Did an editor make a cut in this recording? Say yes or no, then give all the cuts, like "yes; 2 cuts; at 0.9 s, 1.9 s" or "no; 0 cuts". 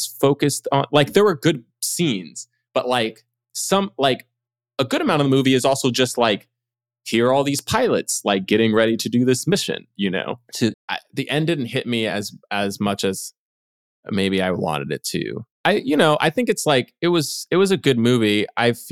yes; 1 cut; at 10.7 s